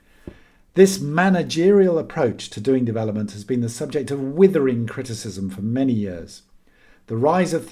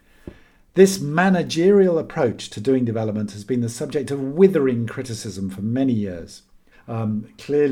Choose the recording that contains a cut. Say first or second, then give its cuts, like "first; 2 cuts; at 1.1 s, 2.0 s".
second; 1 cut; at 6.7 s